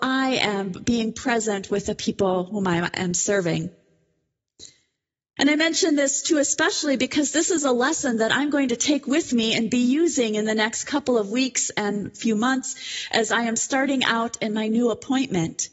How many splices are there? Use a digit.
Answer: 1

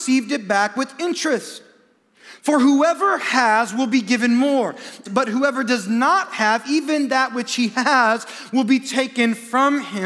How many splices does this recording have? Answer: 2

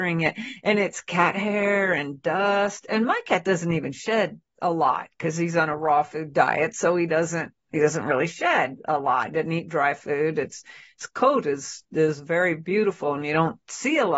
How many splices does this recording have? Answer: 0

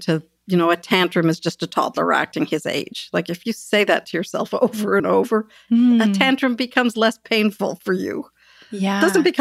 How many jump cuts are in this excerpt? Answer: 0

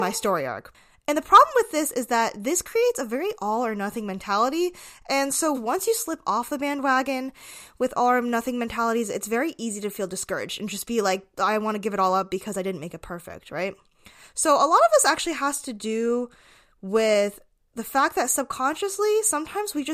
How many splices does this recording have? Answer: 1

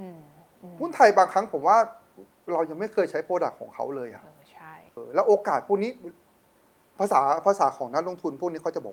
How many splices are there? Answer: 1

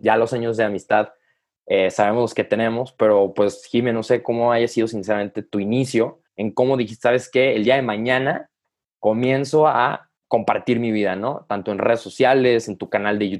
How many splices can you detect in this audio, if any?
1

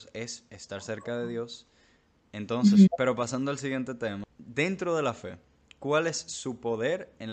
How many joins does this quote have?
1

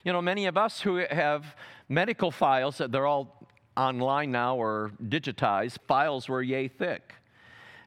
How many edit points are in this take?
1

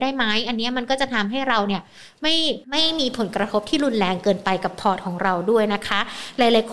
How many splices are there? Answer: 1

